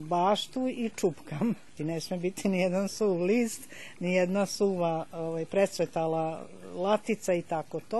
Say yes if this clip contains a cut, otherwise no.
yes